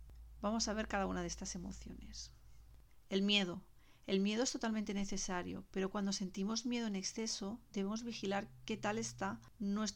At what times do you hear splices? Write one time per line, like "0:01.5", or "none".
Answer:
none